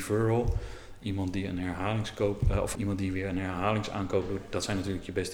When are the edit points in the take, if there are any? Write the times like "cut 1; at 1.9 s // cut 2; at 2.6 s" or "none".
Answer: cut 1; at 2.7 s